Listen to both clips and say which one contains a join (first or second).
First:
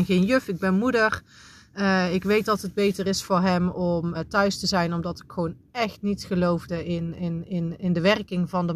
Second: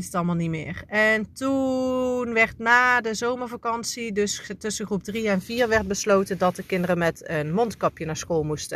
first